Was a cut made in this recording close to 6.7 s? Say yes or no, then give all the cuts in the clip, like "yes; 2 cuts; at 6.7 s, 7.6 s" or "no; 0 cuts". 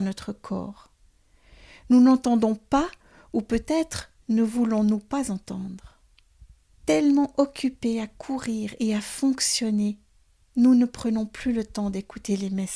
yes; 1 cut; at 6.7 s